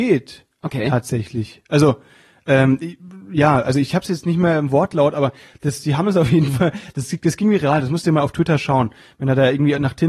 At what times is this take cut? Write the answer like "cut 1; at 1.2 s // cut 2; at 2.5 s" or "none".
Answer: none